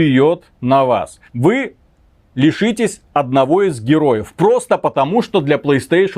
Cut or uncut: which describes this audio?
cut